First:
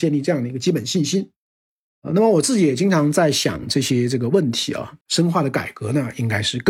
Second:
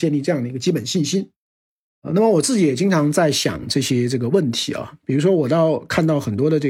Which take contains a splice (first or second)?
first